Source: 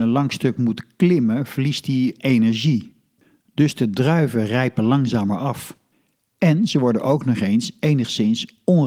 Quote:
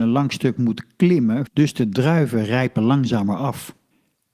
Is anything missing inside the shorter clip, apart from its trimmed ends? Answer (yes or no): yes